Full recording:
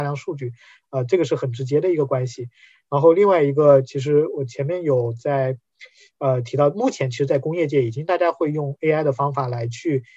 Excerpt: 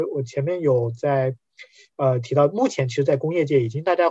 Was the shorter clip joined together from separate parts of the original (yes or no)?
no